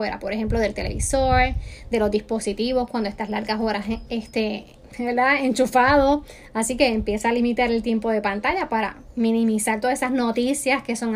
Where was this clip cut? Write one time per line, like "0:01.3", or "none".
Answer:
none